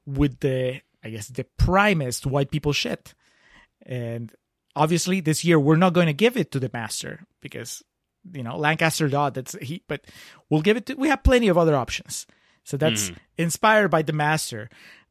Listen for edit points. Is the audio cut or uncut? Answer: cut